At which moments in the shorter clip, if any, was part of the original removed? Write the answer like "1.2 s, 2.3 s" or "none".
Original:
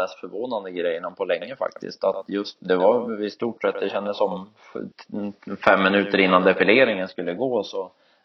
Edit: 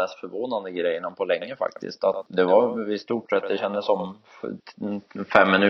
2.3 s